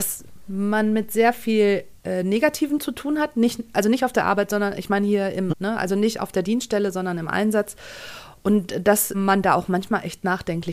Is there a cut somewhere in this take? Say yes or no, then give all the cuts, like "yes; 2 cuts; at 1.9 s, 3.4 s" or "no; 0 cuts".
yes; 3 cuts; at 2.0 s, 5.5 s, 9.1 s